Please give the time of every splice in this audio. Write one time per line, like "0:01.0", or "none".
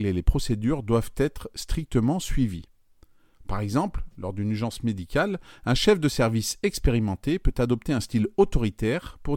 none